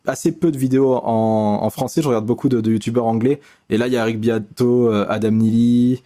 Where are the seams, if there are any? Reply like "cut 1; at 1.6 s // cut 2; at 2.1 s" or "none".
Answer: none